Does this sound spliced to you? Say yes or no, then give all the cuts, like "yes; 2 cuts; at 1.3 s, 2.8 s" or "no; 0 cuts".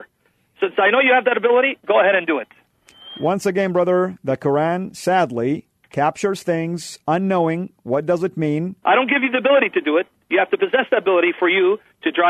yes; 1 cut; at 8.8 s